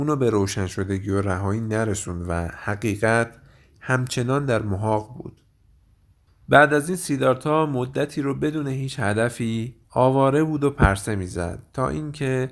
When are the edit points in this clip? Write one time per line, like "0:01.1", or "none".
0:06.3
0:09.8